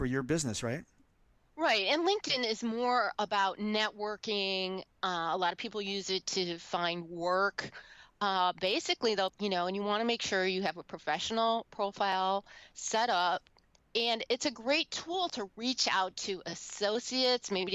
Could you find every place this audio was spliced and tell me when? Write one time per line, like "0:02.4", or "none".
0:09.3

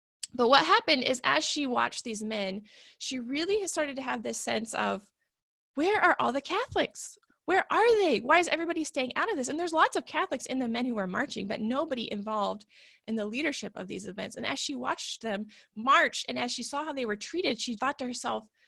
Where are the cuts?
0:07.3
0:17.8

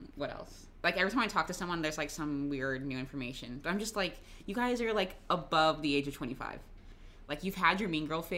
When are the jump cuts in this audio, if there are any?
none

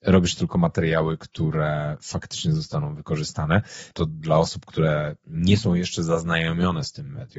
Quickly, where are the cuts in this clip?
0:03.9

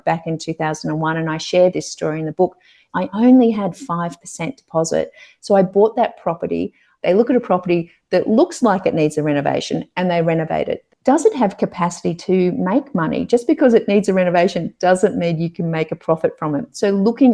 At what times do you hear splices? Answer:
0:02.9
0:07.0
0:10.9

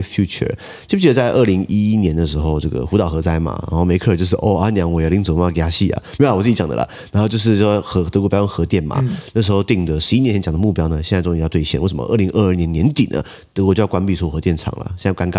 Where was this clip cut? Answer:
none

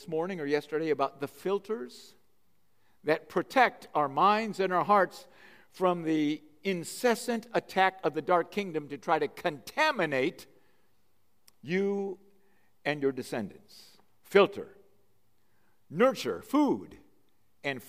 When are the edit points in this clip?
none

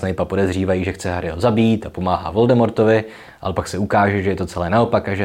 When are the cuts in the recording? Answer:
none

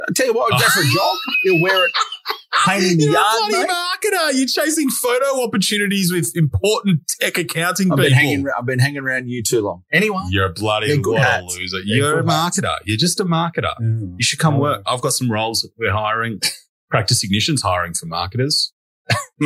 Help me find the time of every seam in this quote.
none

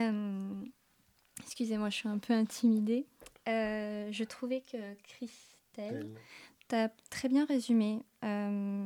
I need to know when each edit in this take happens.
none

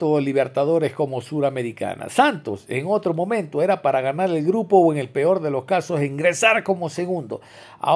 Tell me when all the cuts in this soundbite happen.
none

